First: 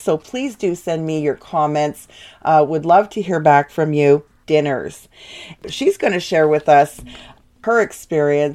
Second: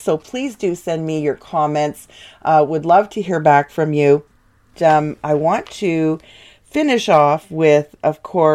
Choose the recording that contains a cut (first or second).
first